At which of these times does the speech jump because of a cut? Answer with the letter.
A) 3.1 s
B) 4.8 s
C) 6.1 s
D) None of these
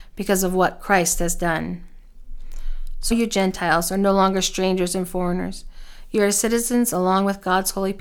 A